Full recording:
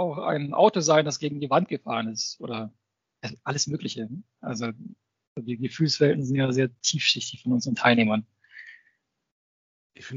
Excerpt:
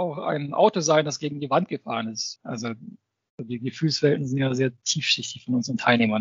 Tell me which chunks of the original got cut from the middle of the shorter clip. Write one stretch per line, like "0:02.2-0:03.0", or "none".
0:02.4-0:04.3